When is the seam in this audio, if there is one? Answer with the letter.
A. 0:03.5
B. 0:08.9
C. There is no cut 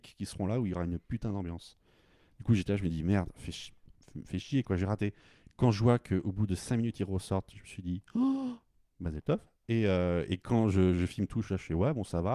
C